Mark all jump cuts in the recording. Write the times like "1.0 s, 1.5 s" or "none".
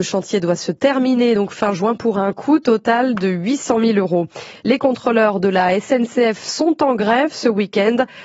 none